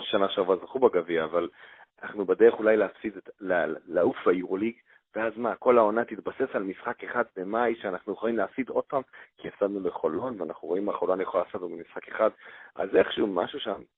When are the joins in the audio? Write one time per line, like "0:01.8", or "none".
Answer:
0:09.3